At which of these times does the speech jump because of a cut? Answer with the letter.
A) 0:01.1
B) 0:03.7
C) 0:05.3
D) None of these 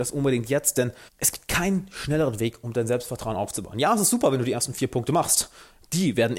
A